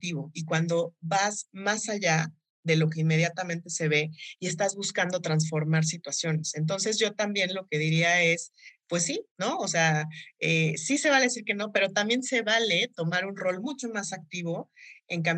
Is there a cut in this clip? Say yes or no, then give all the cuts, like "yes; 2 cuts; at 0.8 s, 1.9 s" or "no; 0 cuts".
yes; 1 cut; at 8.8 s